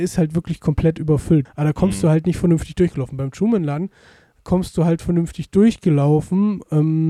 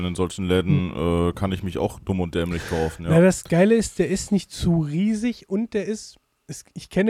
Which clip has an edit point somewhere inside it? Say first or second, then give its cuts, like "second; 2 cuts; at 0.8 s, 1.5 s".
first; 1 cut; at 1.5 s